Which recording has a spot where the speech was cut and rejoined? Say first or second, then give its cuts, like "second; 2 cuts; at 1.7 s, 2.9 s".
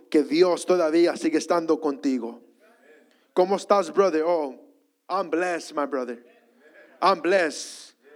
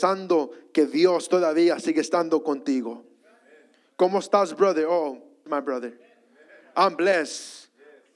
second; 1 cut; at 5.5 s